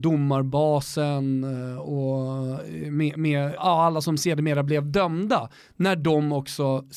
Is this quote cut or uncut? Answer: cut